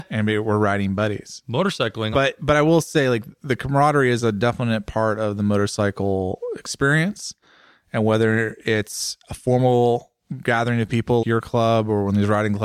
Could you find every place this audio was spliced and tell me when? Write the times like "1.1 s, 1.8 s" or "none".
2.1 s, 11.2 s